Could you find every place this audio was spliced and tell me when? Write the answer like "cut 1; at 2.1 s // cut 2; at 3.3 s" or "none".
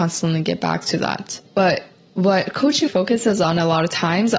cut 1; at 1.5 s // cut 2; at 2.9 s